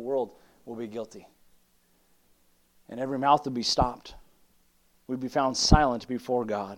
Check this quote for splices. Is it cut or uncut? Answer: uncut